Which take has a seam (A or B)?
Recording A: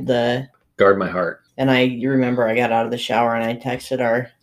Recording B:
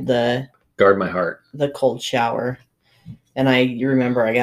A